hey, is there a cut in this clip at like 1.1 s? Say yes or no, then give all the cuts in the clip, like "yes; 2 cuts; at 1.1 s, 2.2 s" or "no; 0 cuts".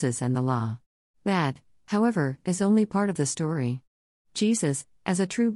yes; 2 cuts; at 1.1 s, 4.2 s